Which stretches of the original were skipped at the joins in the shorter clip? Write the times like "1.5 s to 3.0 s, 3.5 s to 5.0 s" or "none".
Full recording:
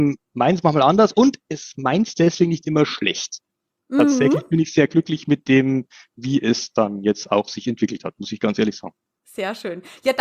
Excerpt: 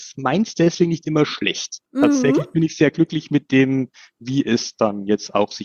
3.5 s to 3.8 s